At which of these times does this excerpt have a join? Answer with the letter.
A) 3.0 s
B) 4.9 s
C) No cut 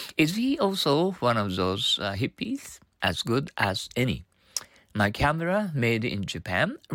A